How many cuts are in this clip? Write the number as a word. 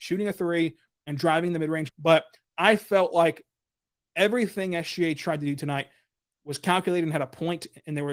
one